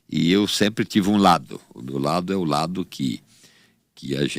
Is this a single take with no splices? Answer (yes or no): yes